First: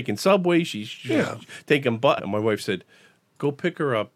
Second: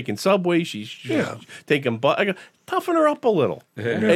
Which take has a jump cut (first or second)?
first